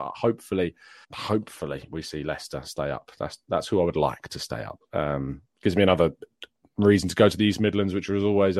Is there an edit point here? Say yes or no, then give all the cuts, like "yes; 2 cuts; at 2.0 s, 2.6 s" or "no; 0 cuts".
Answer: yes; 1 cut; at 1.0 s